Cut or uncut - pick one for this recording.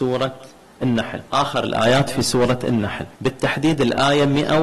cut